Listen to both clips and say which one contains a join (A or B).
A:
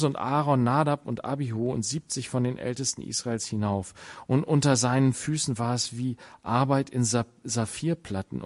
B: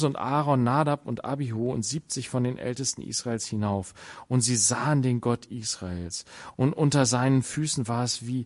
A